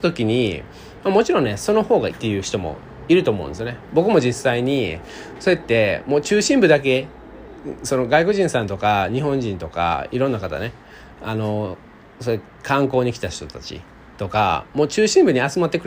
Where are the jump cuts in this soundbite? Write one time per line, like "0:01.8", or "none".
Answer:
0:02.1